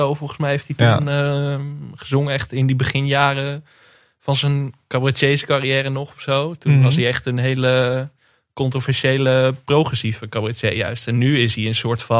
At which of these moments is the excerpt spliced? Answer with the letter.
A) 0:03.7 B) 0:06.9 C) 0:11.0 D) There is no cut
D